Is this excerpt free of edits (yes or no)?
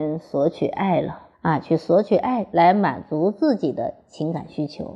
no